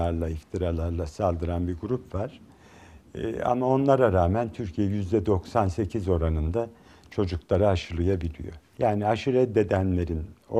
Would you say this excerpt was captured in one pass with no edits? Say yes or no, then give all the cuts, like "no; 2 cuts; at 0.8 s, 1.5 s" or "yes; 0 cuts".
no; 1 cut; at 8.8 s